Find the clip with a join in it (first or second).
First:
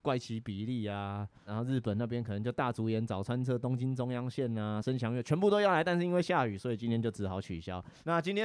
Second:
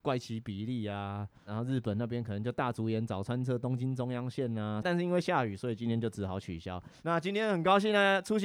second